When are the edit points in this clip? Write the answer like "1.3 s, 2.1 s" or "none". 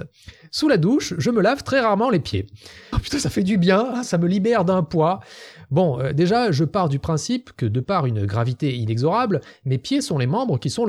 2.9 s